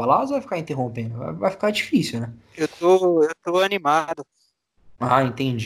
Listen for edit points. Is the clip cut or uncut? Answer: uncut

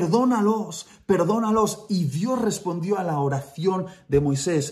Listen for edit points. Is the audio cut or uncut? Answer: uncut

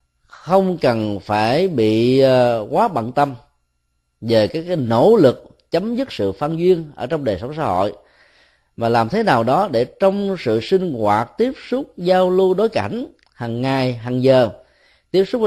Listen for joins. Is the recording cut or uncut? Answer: uncut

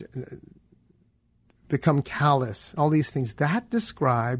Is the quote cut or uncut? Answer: uncut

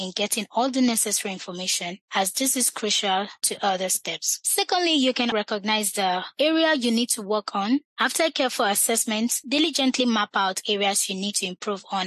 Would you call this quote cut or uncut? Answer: cut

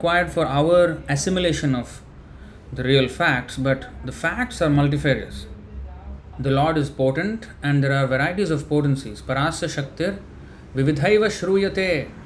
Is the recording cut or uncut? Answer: cut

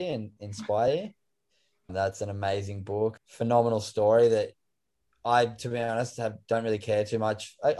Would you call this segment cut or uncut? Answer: cut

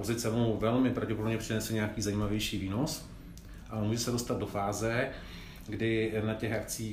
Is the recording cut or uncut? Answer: uncut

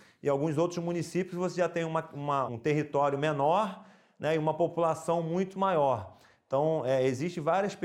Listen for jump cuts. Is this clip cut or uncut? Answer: cut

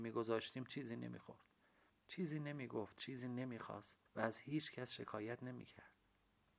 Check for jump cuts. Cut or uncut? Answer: cut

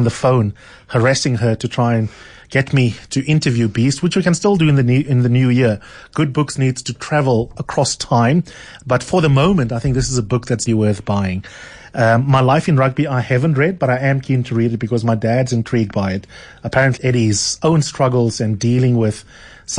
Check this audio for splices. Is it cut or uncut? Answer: cut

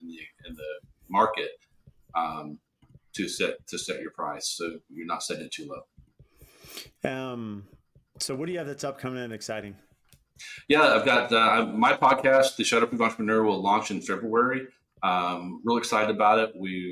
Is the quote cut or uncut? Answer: uncut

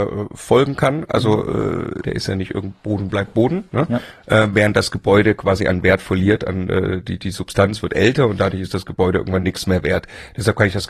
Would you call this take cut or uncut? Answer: cut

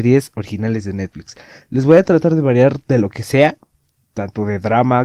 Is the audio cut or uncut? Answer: uncut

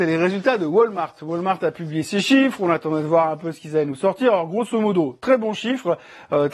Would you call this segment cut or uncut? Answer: uncut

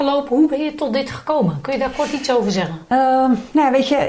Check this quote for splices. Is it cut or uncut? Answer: uncut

